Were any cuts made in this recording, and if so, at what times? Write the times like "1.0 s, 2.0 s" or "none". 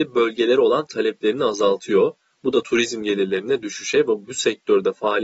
none